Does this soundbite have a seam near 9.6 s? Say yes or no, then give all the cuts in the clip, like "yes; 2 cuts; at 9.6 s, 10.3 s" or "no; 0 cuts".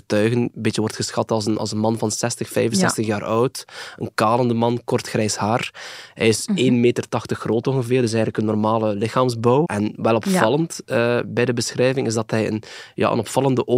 yes; 1 cut; at 9.6 s